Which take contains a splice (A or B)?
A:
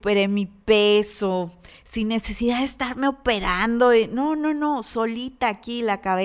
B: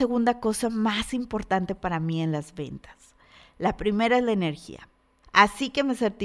B